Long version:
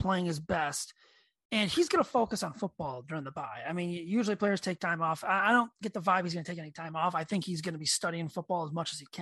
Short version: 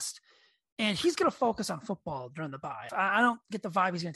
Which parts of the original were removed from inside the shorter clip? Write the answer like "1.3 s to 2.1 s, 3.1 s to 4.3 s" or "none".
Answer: 3.6 s to 5.2 s